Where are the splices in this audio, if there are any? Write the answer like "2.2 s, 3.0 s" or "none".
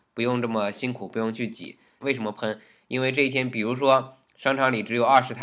2.0 s